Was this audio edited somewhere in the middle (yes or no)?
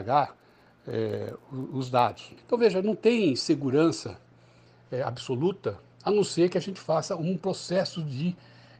yes